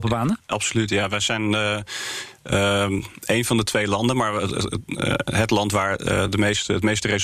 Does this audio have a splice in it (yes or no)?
no